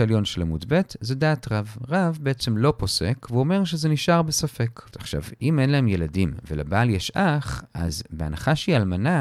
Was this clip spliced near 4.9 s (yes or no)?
yes